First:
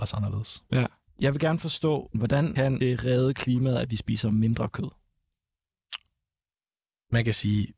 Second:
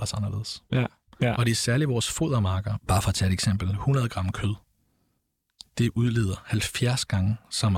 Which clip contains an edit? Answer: second; 2 cuts; at 1.1 s, 2.8 s

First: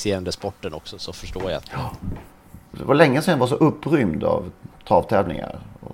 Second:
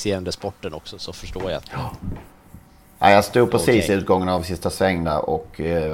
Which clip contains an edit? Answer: first; 1 cut; at 2.7 s

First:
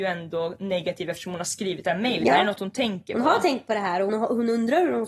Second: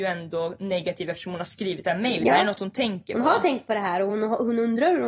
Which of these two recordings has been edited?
first; 1 cut; at 4.1 s

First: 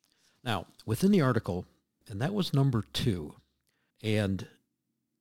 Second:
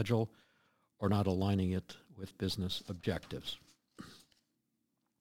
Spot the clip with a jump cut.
first; 2 cuts; at 2.0 s, 3.9 s

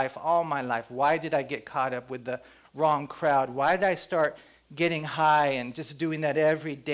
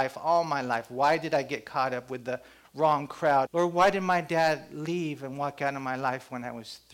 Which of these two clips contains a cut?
second; 1 cut; at 3.5 s

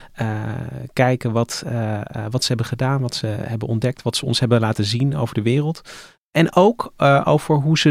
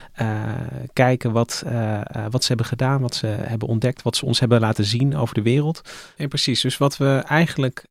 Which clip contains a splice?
second; 1 cut; at 6.2 s

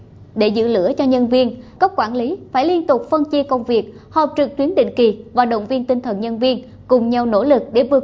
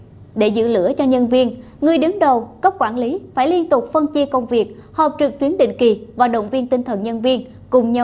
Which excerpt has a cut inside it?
first; 1 cut; at 1.8 s

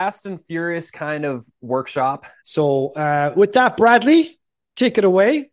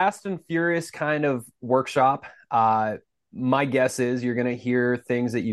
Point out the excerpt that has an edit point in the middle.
first; 1 cut; at 2.4 s

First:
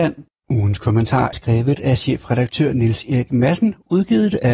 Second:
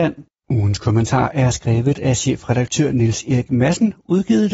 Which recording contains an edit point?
first; 1 cut; at 1.3 s

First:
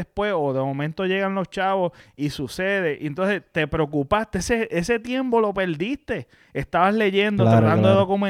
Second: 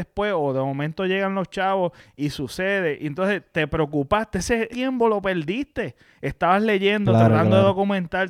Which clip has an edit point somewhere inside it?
second; 1 cut; at 4.7 s

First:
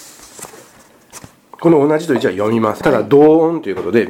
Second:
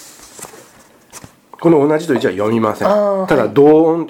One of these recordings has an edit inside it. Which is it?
first; 1 cut; at 2.8 s

